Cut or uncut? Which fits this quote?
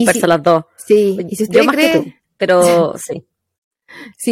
uncut